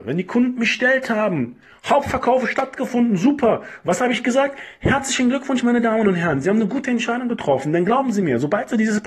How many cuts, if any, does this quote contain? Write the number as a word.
zero